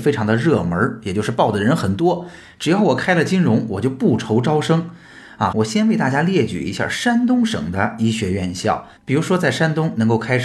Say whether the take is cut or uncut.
cut